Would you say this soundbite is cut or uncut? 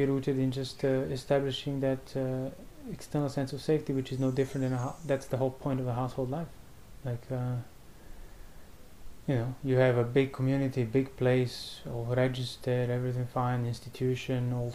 cut